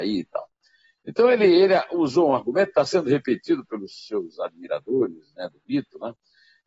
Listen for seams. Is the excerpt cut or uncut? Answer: uncut